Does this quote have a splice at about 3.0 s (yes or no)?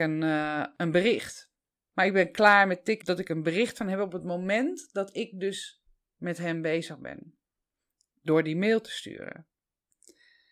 yes